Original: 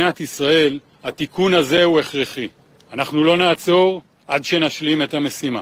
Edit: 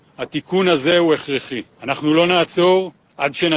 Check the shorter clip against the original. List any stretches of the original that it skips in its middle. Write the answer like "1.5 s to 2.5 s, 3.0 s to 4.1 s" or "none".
2.6 s to 2.8 s